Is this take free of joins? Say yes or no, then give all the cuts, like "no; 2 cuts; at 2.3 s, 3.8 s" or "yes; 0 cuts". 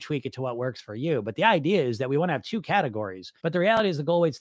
no; 1 cut; at 3.4 s